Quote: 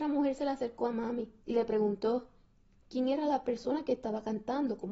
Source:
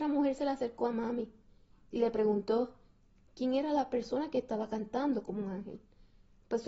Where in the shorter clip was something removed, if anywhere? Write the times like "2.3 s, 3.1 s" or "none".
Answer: 1.4 s